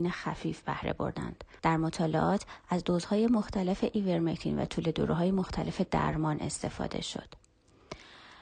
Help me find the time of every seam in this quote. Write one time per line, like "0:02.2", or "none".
0:01.6